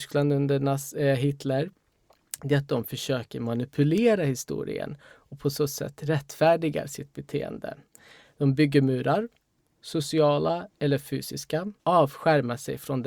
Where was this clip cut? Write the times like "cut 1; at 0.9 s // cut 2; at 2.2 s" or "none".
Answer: cut 1; at 11.8 s